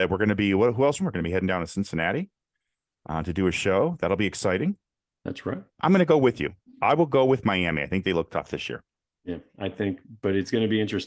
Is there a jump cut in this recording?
yes; 2 cuts; at 1.0 s, 5.7 s

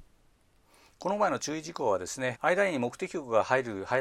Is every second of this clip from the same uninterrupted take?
no; 1 cut; at 2.3 s

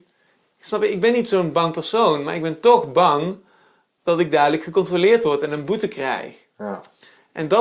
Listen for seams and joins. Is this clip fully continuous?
yes; 0 cuts

